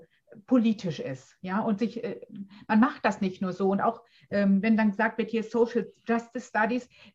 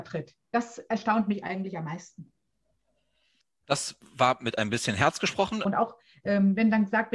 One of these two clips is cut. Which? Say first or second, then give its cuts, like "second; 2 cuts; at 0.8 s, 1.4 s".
second; 1 cut; at 5.7 s